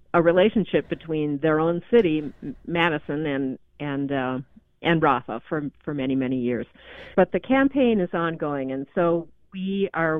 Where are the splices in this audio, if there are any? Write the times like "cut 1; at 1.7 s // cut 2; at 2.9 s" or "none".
cut 1; at 7.1 s